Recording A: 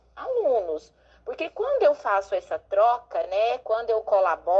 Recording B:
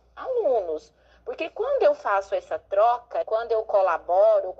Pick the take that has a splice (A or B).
B